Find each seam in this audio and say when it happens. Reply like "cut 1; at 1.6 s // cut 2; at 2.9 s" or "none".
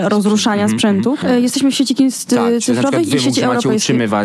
cut 1; at 1.2 s